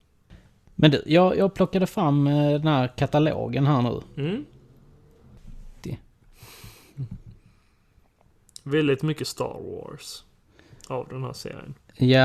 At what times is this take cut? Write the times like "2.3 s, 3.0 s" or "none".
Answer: 5.8 s